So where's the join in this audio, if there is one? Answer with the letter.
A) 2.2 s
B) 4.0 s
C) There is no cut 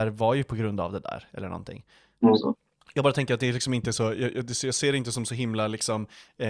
A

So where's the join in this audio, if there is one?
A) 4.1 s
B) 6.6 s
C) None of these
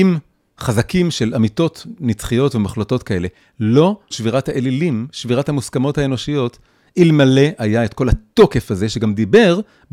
A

